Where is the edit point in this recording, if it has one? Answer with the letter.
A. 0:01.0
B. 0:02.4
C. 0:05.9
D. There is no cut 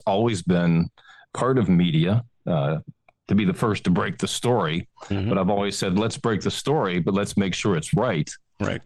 D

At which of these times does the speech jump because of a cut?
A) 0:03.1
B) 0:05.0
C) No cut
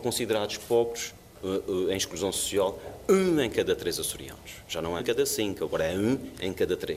B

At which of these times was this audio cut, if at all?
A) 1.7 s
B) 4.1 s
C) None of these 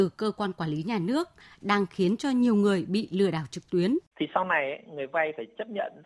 B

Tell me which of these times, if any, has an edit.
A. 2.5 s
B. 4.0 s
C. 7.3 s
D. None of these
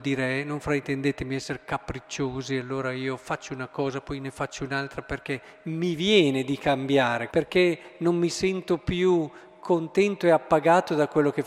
C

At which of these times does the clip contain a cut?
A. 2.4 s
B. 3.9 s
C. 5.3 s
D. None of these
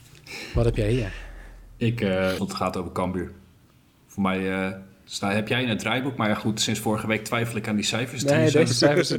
A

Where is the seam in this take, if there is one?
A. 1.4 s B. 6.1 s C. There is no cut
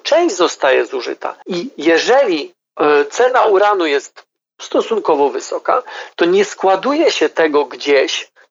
A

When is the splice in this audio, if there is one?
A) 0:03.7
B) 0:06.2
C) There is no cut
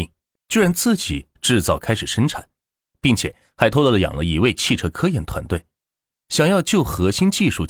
A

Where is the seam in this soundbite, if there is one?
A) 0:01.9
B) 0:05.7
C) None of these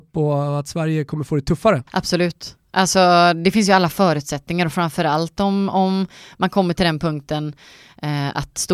A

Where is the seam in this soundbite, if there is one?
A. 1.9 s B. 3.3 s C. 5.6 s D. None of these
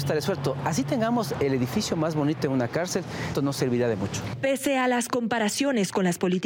B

